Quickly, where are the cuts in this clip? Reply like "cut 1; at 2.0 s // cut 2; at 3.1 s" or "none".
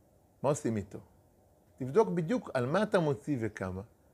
cut 1; at 1.7 s